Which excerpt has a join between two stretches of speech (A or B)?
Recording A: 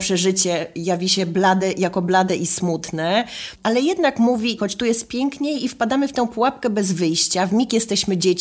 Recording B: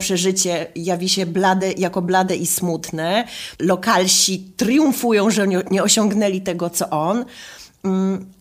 A